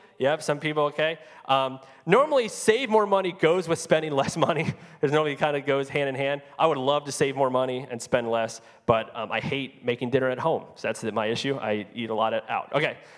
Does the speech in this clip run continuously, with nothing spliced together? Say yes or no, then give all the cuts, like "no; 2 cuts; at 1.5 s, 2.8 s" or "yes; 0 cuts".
yes; 0 cuts